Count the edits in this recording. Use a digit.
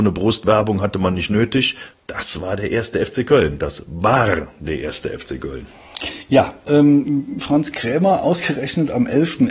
2